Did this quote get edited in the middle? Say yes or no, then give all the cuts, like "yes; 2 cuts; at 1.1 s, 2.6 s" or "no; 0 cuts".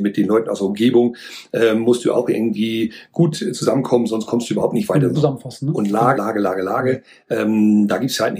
yes; 2 cuts; at 5.1 s, 6.1 s